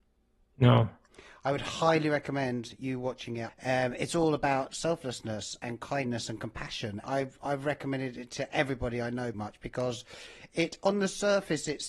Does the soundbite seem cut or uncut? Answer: cut